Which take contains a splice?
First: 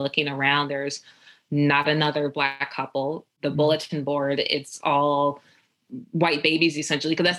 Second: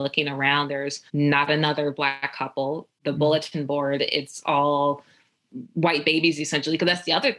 second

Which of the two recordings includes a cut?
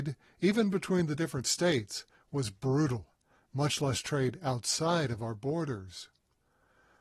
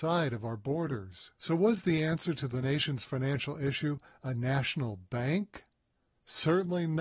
second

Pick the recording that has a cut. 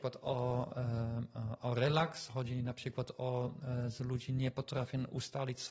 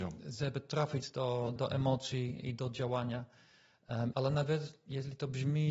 second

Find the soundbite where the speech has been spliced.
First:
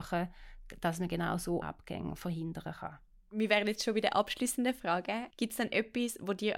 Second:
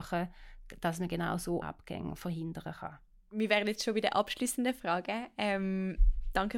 first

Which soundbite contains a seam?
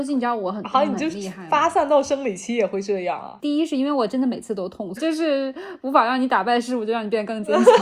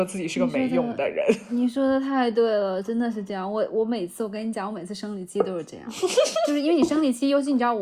first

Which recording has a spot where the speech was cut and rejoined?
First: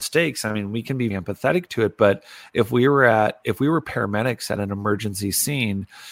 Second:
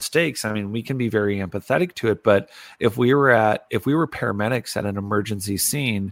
first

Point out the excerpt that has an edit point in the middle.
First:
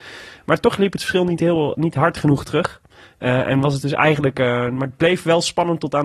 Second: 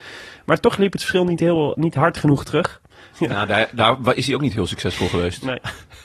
second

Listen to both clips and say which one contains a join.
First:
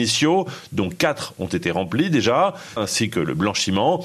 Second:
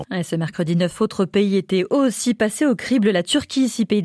first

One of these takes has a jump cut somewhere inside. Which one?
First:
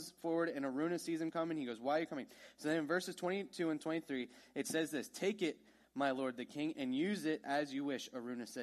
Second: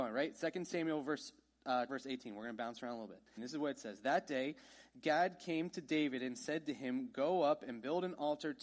second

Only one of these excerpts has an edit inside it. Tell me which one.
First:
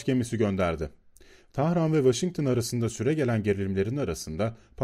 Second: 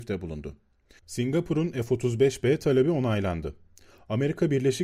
second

